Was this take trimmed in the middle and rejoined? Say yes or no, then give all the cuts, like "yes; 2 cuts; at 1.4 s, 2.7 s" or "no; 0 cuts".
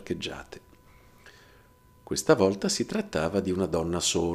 no; 0 cuts